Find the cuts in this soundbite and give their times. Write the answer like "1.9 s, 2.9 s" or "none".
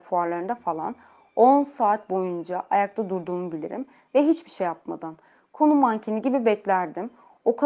none